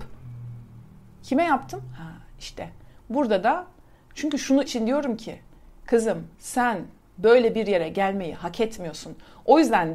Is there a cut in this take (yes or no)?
yes